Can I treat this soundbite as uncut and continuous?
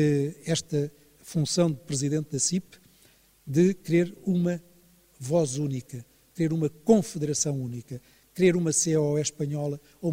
no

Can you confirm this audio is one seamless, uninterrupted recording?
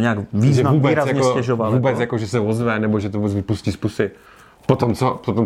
yes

